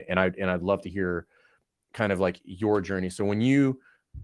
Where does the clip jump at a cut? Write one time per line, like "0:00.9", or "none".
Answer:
none

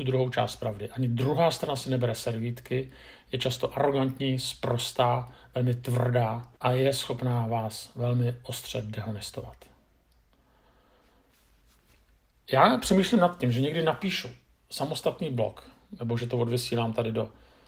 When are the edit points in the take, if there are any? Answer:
0:06.6

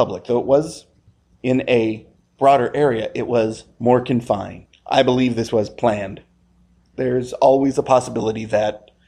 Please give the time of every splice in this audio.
none

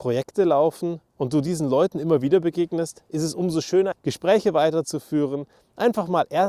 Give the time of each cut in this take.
0:03.9

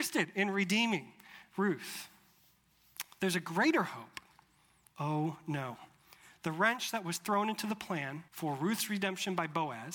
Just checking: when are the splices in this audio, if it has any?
0:04.9
0:08.3

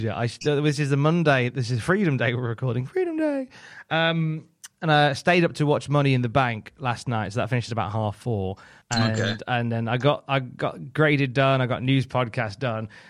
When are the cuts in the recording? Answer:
0:08.8

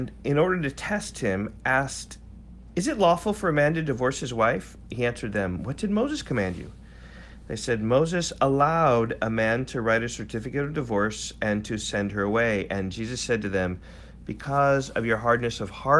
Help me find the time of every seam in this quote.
none

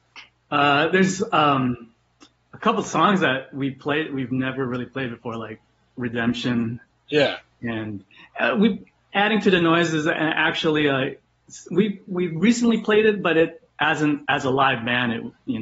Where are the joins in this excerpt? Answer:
none

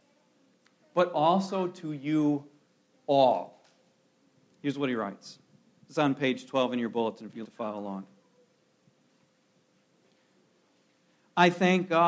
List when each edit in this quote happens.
0:07.4

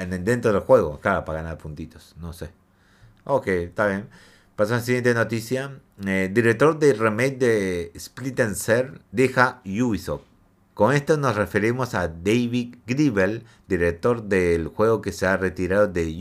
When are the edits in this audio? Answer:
0:09.0
0:10.7
0:12.8

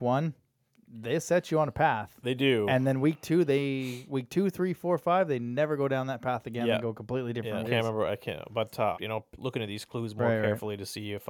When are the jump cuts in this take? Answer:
0:07.6
0:08.9

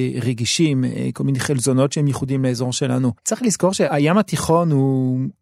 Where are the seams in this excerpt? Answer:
0:03.2

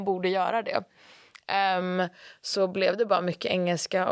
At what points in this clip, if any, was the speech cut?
none

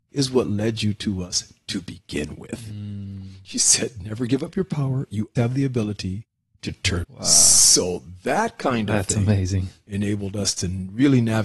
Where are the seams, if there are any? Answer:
0:05.4
0:07.0

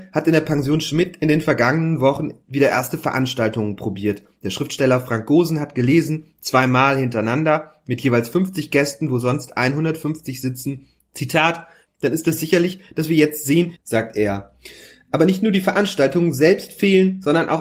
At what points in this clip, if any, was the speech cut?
0:11.9
0:13.8

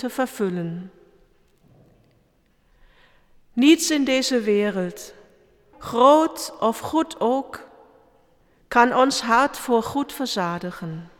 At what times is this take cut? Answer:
0:05.7

